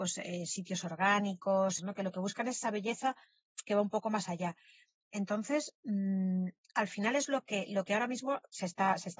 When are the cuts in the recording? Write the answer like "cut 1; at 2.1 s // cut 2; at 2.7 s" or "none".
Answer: cut 1; at 1.8 s